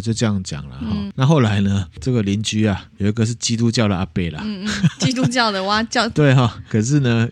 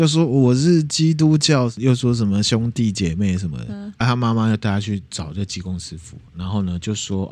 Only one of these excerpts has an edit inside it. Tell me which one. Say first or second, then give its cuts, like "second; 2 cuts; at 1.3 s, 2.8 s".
second; 1 cut; at 4.0 s